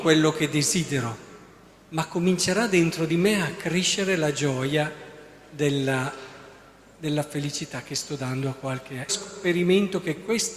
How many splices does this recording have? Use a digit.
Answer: 1